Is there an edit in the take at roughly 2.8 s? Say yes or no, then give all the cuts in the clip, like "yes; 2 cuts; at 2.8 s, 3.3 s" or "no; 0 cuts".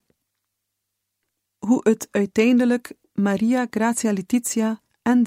no; 1 cut; at 1.5 s